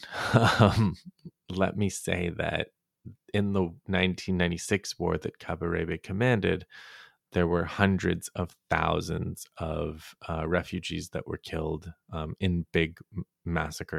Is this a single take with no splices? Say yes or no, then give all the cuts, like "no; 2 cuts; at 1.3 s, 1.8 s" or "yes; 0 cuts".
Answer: yes; 0 cuts